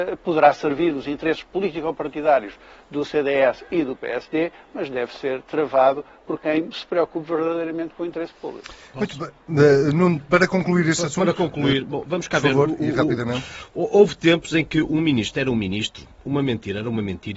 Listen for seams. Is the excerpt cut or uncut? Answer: uncut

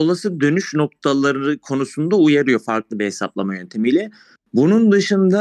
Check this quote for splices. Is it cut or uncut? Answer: uncut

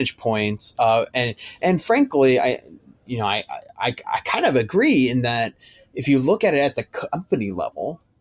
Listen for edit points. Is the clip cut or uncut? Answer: uncut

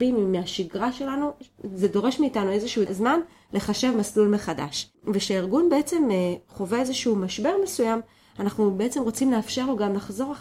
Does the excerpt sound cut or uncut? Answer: uncut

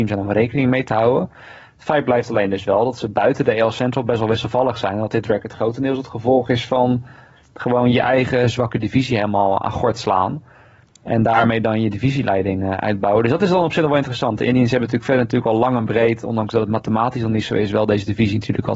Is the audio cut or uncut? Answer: uncut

